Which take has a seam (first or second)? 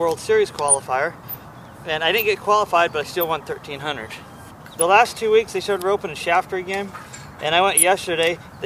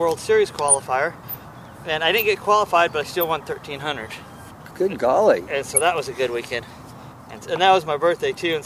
first